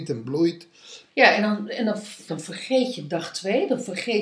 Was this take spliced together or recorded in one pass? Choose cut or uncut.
cut